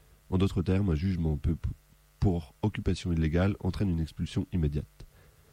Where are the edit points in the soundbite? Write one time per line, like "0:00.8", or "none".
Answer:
none